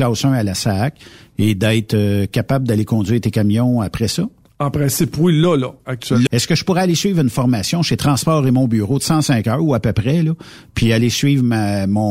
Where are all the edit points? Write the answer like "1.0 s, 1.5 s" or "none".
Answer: 6.3 s